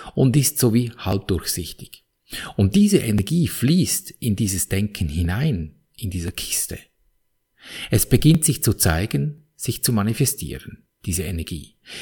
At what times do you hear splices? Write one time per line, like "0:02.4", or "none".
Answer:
none